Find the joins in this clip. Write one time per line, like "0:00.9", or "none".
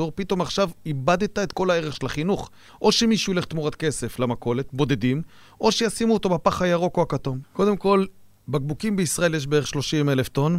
0:02.7
0:07.4